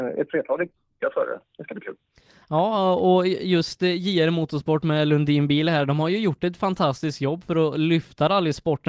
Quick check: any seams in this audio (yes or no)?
no